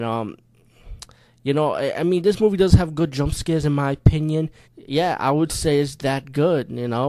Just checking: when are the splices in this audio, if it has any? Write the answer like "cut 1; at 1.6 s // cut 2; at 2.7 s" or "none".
cut 1; at 4.6 s